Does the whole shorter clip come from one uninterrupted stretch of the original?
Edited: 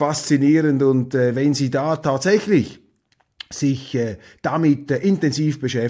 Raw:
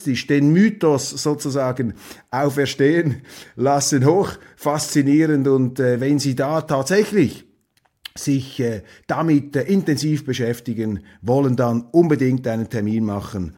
yes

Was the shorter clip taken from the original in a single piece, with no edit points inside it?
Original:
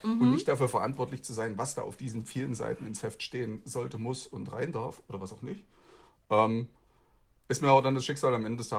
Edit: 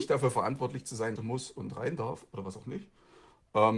no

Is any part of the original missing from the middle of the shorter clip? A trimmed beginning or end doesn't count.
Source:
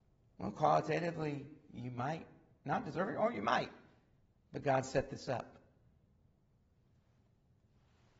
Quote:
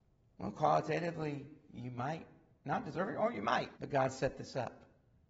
yes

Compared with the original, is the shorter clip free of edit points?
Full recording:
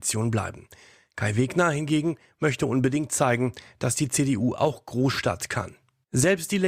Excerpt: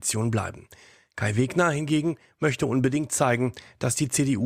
yes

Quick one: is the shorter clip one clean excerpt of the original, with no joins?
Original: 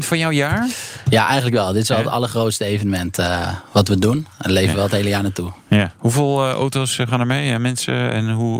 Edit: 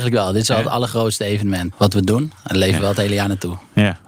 no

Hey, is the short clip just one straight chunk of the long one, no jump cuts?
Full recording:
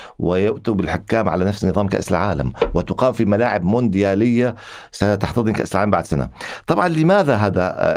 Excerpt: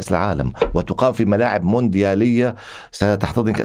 yes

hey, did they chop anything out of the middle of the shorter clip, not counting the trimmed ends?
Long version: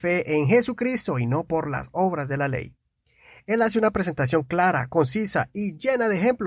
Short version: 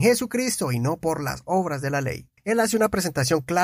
yes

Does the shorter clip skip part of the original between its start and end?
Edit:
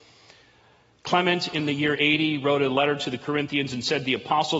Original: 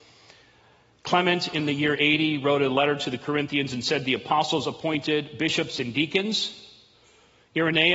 no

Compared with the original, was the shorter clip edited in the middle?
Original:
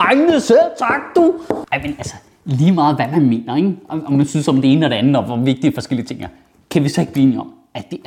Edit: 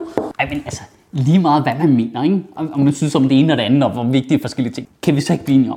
yes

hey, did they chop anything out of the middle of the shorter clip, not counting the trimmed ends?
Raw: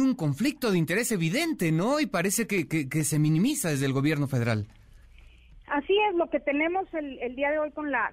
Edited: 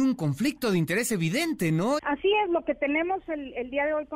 yes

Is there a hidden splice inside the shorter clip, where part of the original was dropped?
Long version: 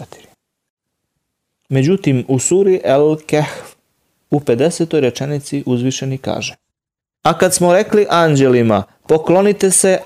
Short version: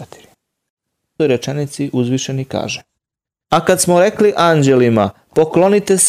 yes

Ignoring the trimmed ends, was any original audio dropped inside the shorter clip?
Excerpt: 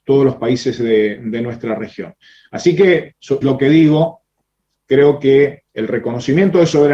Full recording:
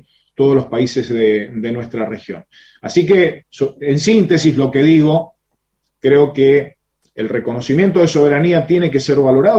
yes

